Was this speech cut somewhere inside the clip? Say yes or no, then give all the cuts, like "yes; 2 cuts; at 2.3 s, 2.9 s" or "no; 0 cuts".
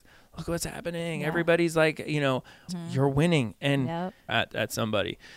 yes; 2 cuts; at 2.7 s, 4.3 s